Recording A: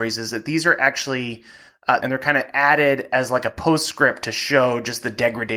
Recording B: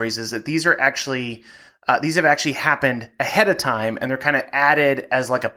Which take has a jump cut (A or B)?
A